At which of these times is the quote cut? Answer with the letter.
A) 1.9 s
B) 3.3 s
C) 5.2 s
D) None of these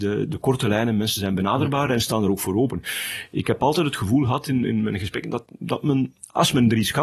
D